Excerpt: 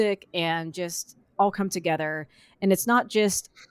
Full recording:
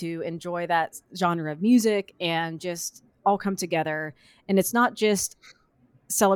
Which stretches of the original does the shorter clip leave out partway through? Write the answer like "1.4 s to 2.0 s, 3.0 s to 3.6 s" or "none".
none